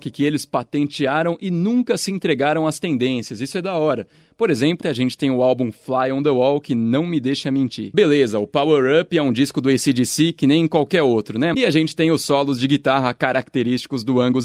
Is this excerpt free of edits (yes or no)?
no